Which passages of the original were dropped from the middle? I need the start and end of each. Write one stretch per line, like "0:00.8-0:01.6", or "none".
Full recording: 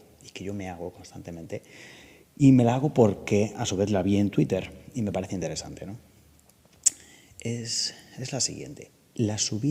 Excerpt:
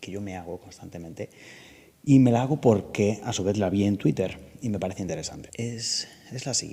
0:05.8-0:07.3